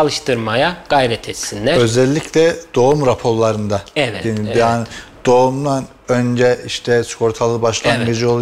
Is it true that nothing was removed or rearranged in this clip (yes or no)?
no